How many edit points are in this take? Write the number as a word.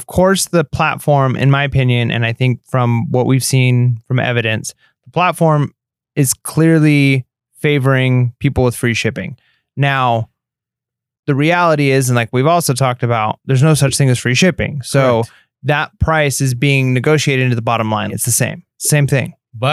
one